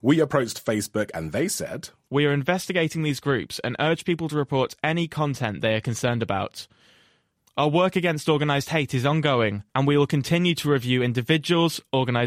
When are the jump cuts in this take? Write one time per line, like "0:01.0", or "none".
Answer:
0:09.7